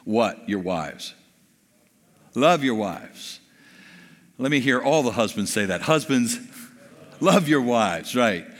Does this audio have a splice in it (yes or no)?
no